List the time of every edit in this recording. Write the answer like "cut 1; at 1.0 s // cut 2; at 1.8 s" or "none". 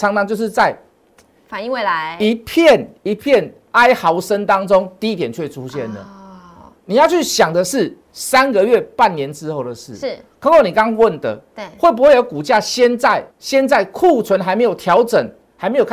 cut 1; at 13.3 s